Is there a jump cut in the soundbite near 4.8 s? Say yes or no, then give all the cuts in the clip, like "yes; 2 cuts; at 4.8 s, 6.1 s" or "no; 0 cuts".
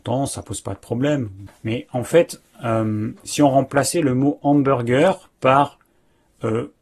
no; 1 cut; at 1.5 s